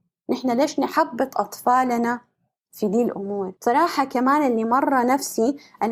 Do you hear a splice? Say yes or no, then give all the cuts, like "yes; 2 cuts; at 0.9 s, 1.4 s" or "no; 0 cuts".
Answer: yes; 1 cut; at 3.6 s